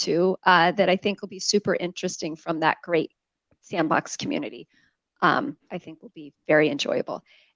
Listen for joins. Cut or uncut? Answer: uncut